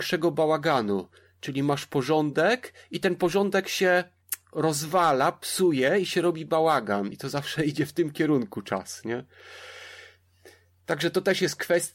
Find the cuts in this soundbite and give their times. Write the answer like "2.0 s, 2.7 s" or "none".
none